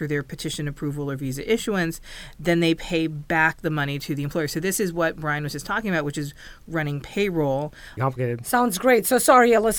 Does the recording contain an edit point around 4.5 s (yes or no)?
no